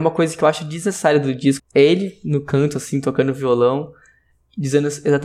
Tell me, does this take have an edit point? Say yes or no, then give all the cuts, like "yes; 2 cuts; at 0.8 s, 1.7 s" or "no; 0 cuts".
yes; 1 cut; at 1.6 s